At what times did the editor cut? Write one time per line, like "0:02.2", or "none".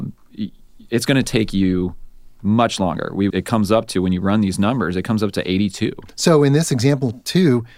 0:03.3
0:06.1